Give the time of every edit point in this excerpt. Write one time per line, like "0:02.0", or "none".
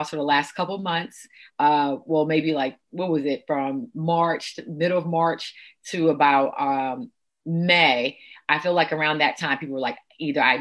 none